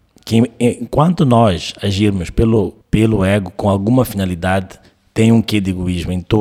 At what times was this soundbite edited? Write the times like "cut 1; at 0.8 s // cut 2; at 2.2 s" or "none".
cut 1; at 2.8 s